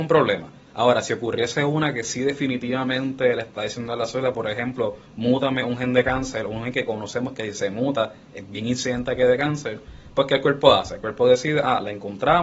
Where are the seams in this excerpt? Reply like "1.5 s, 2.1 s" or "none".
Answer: none